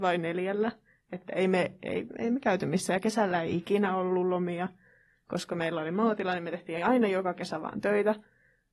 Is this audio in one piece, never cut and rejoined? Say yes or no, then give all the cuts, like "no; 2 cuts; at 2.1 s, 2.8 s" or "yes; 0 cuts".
yes; 0 cuts